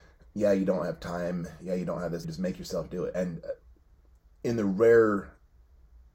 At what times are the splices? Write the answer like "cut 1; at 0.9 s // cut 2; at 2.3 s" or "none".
cut 1; at 2.2 s